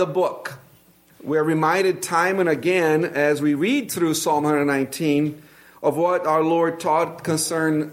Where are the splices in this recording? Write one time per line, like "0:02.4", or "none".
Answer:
0:01.1